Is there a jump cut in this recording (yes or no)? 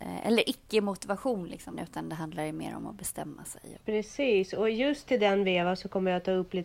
yes